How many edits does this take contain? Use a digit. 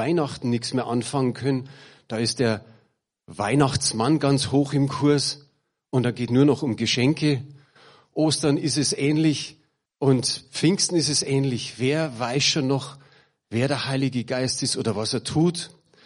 2